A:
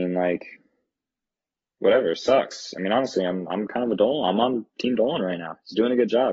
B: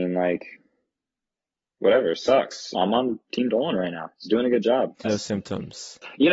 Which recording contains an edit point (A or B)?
B